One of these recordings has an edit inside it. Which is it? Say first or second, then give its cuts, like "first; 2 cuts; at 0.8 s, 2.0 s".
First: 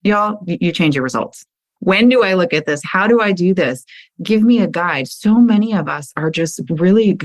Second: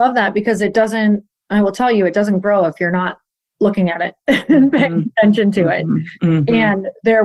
first; 1 cut; at 1.8 s